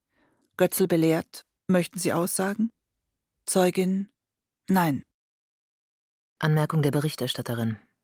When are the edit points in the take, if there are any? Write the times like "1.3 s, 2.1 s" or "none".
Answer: 1.6 s